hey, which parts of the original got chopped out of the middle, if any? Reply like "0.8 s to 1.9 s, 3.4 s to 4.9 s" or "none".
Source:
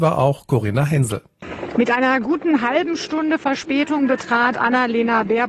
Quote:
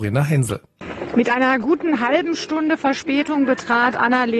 none